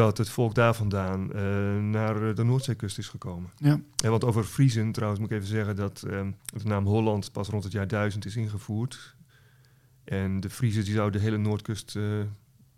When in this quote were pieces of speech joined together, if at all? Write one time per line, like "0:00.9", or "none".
0:06.4